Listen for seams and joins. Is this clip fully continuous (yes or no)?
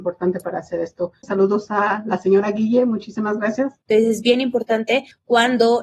no